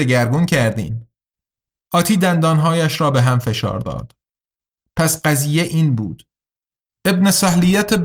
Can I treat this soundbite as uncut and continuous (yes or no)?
yes